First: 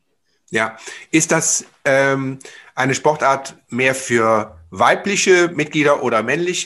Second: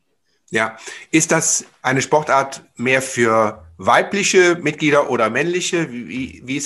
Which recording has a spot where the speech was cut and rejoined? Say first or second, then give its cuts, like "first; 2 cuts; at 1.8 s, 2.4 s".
second; 1 cut; at 1.8 s